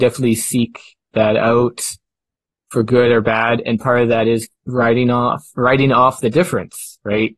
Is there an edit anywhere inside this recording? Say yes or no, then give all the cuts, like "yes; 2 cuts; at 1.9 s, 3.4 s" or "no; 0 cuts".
no; 0 cuts